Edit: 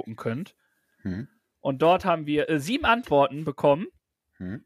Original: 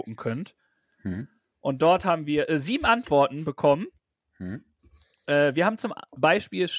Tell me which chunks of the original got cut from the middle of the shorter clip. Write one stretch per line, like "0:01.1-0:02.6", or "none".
none